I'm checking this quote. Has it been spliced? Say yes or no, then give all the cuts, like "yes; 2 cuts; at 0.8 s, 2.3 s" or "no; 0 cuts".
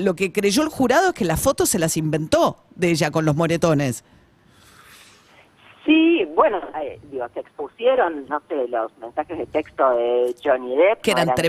yes; 2 cuts; at 6.7 s, 8.3 s